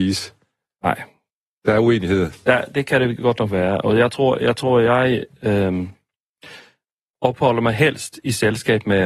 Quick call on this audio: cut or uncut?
uncut